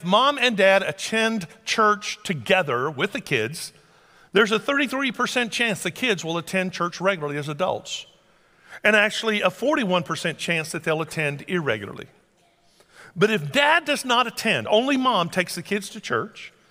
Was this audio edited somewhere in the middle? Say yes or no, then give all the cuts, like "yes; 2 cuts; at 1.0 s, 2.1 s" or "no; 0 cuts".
no; 0 cuts